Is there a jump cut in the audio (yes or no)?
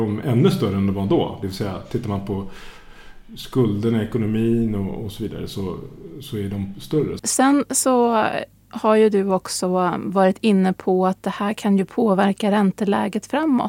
yes